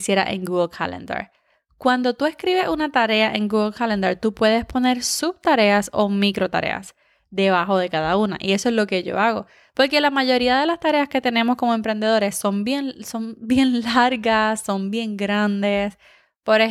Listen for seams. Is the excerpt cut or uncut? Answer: uncut